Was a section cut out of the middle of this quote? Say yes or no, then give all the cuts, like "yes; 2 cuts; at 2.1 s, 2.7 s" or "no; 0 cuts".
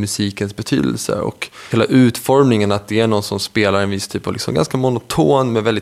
yes; 1 cut; at 1.7 s